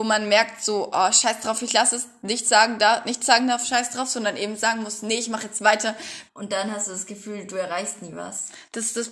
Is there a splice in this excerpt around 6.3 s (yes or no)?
yes